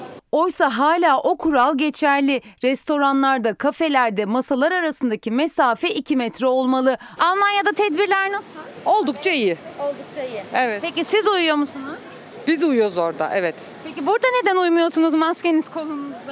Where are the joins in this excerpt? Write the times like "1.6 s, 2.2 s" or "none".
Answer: 7.2 s